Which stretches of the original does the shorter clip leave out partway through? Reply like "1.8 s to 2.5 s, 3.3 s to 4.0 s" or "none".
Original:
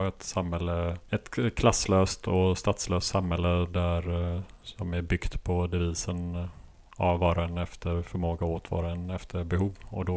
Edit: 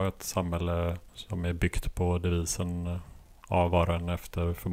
1.1 s to 4.6 s